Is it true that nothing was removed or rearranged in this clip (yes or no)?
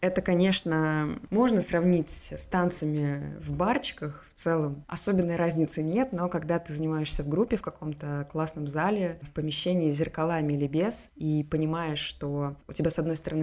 yes